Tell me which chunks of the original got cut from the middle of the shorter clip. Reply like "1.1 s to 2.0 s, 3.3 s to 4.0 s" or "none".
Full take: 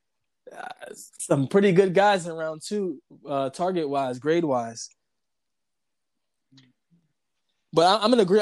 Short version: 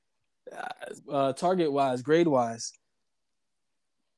1.0 s to 3.1 s